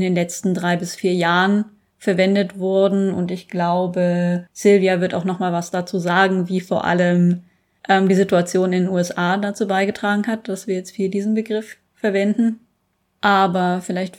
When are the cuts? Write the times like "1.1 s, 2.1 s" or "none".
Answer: none